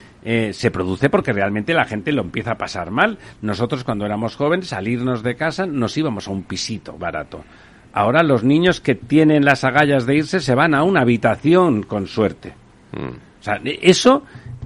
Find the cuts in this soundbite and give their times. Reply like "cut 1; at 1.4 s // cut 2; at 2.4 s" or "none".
none